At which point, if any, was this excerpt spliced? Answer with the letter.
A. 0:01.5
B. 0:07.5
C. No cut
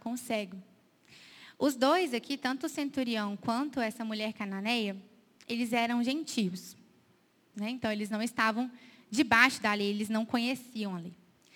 B